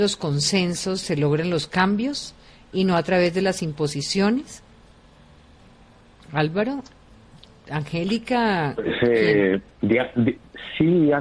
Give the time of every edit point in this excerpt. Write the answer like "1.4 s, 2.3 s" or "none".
none